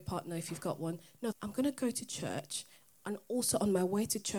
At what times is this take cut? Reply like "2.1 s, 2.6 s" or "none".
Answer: 1.3 s